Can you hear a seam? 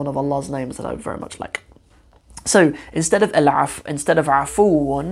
no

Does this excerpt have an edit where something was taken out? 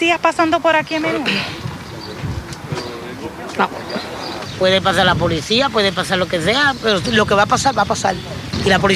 no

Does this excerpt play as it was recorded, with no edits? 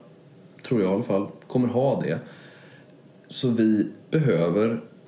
no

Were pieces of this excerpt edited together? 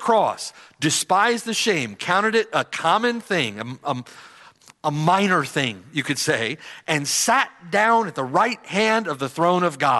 no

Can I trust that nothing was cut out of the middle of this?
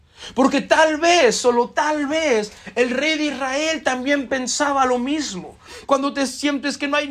no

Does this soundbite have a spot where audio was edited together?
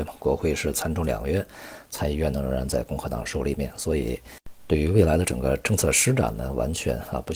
no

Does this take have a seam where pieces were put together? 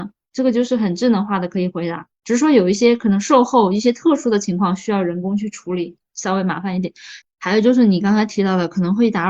yes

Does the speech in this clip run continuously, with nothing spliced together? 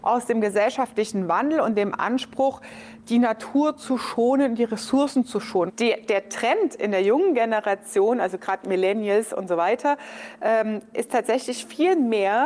no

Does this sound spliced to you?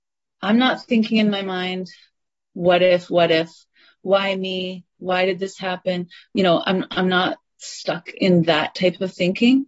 no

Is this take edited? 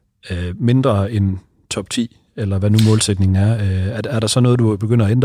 no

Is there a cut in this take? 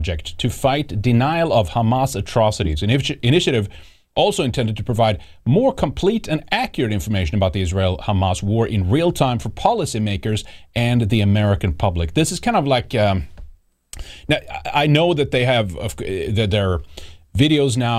no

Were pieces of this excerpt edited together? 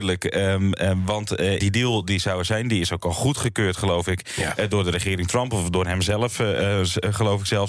yes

